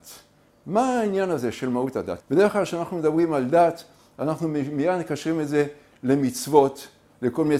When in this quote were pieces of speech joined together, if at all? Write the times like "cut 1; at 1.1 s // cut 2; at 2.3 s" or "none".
cut 1; at 2.2 s